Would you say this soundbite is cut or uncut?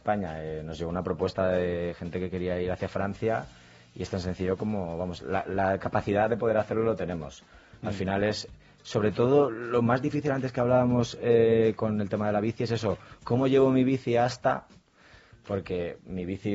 uncut